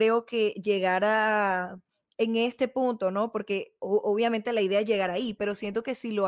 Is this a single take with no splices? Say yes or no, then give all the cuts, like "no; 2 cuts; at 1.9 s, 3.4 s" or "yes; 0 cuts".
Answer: yes; 0 cuts